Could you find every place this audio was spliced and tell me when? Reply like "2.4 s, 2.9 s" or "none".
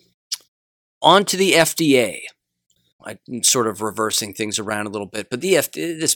3.0 s